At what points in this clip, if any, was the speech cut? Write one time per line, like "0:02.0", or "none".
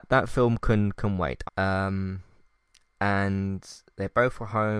0:01.5